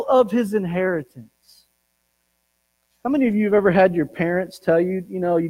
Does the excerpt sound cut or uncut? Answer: uncut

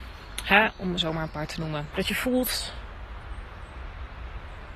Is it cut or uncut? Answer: cut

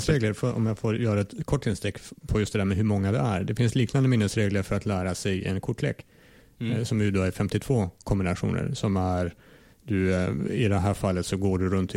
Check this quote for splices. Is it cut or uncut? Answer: cut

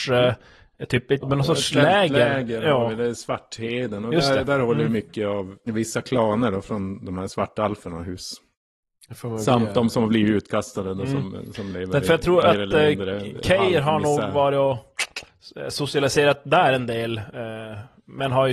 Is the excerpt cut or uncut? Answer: cut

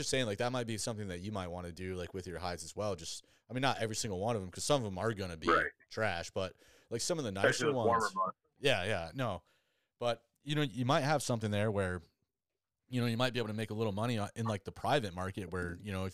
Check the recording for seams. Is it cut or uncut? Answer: uncut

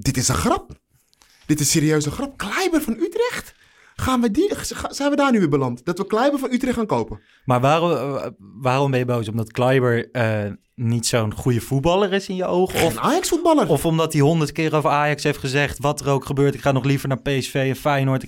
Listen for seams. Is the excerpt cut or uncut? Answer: uncut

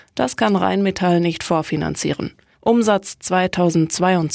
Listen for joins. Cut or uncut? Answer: cut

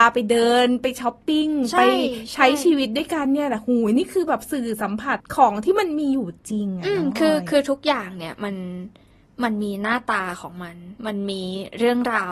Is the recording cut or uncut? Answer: cut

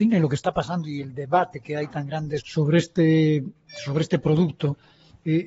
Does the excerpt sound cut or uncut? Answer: cut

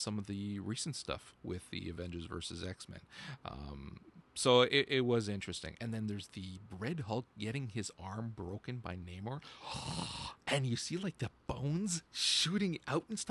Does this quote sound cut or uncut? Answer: cut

